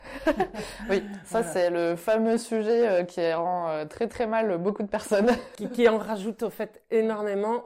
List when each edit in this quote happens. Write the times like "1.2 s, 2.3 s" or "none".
none